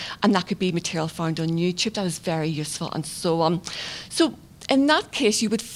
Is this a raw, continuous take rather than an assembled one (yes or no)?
yes